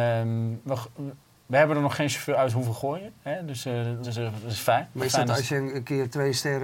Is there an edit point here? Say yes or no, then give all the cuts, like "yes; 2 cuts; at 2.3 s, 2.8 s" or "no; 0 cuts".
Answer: yes; 1 cut; at 4.0 s